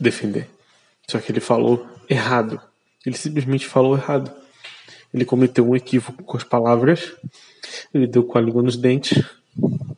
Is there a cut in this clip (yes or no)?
no